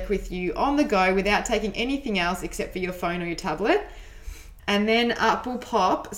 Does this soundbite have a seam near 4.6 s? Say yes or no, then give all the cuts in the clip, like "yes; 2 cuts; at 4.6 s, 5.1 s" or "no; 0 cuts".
yes; 1 cut; at 4.6 s